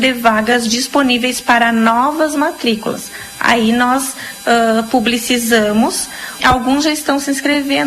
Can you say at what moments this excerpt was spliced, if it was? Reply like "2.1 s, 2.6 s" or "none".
6.4 s